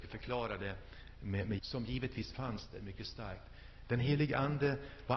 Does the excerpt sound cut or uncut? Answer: cut